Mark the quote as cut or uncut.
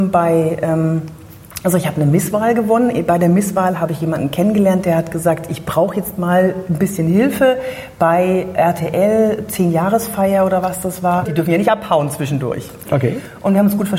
cut